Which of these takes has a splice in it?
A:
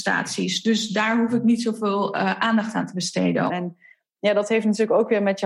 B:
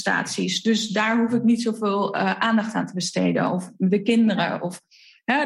A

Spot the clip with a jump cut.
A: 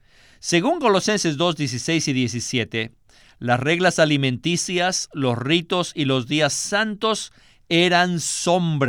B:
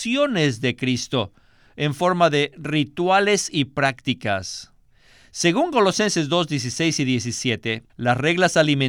B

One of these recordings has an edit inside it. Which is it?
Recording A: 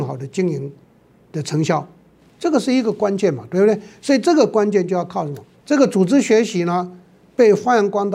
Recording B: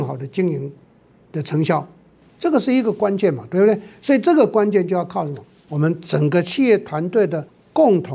A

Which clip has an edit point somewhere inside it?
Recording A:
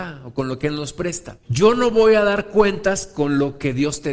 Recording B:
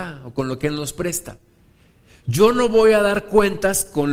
A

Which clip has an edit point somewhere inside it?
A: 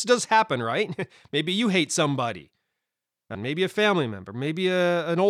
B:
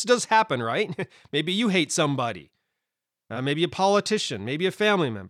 A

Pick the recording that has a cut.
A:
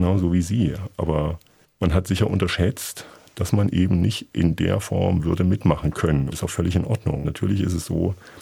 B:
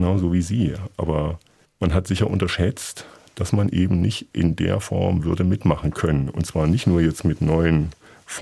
A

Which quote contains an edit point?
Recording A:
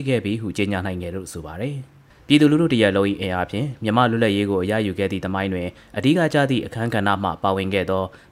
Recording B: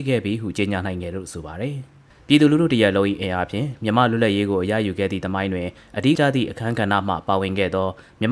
B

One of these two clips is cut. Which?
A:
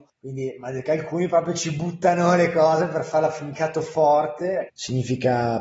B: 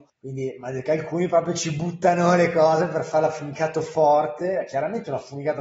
A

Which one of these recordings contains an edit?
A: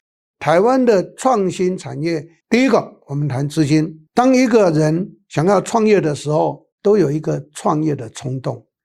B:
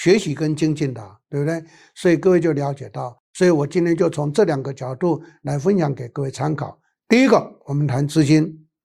A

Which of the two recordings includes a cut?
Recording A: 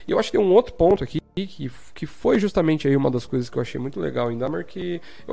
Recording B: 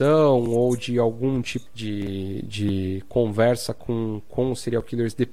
B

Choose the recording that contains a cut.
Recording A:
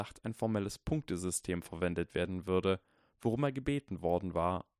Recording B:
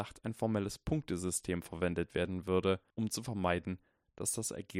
B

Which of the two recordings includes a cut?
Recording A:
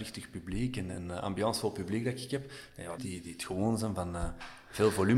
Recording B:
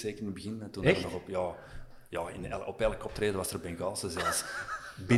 A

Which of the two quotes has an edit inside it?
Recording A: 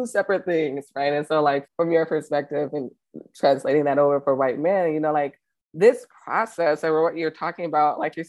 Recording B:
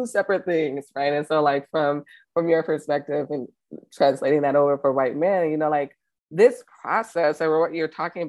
A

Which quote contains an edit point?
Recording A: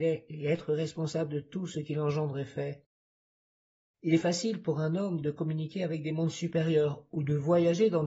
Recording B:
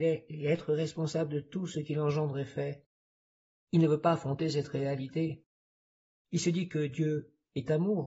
B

